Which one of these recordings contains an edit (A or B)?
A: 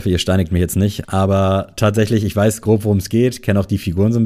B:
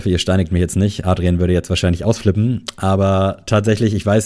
A